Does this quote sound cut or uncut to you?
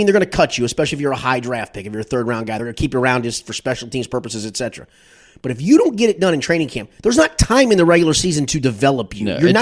uncut